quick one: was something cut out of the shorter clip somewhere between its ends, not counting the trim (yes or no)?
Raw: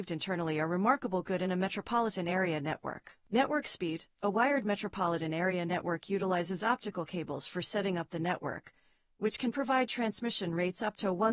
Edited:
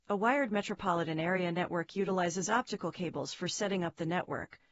no